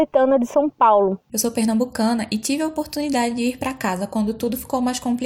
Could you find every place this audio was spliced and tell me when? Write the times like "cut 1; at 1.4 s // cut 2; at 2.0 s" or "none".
cut 1; at 1.3 s

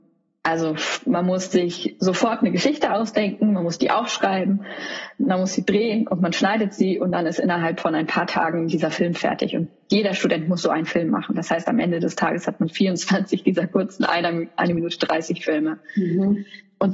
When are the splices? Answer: none

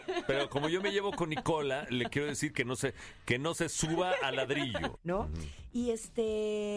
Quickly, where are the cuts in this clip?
cut 1; at 4.9 s

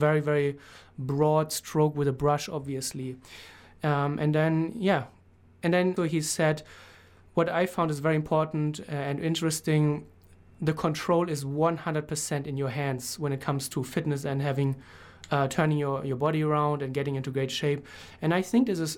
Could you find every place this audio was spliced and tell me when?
cut 1; at 6.0 s

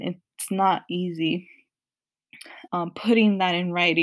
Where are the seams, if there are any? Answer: cut 1; at 2.7 s

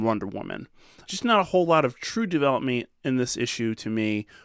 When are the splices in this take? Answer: none

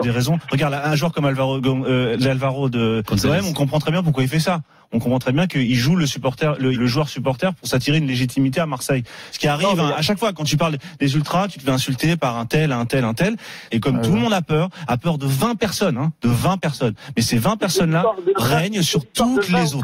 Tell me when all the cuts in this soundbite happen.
cut 1; at 6.7 s // cut 2; at 9.3 s // cut 3; at 13.7 s

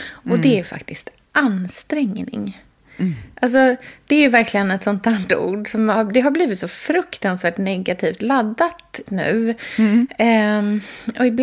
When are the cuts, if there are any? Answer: cut 1; at 9.1 s

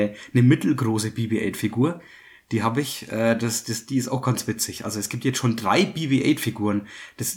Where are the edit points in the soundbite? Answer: none

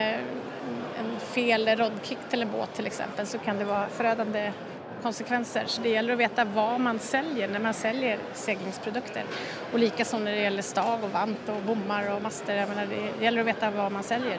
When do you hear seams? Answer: none

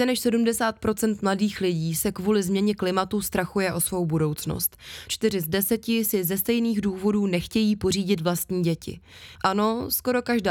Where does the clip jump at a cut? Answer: cut 1; at 9.4 s

